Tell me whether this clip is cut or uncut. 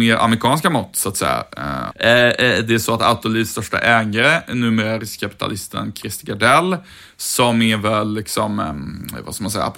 cut